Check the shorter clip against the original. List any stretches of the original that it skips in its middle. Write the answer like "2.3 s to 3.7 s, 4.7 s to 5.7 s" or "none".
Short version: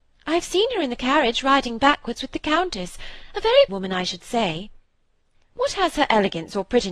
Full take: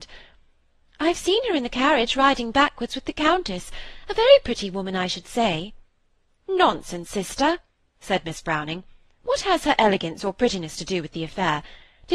4.4 s to 4.7 s, 6.4 s to 9.0 s